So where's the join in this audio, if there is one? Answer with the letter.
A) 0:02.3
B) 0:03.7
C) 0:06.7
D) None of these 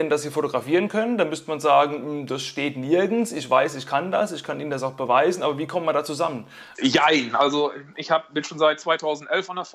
C